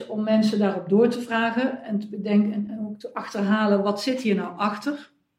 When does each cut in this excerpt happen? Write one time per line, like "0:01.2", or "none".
0:02.7